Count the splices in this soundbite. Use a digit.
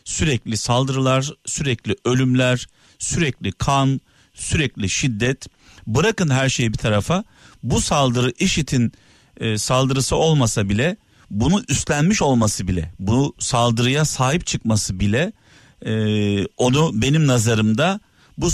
0